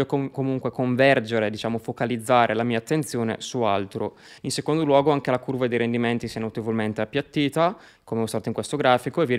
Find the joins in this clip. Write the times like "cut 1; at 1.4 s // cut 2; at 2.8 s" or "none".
cut 1; at 4.4 s